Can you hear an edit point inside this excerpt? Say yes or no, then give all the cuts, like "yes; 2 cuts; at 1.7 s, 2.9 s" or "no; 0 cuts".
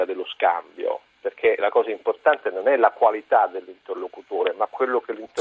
no; 0 cuts